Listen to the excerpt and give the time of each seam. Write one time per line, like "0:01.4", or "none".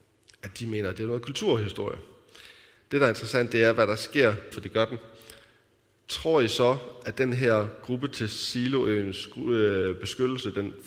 0:02.8
0:04.5